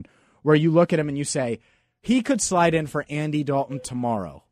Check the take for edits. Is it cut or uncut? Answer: uncut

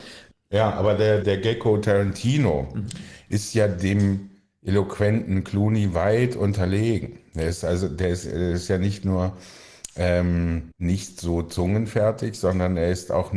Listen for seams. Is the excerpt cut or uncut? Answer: cut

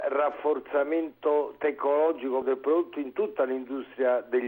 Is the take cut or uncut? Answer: cut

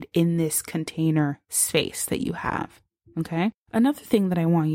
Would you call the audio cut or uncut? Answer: cut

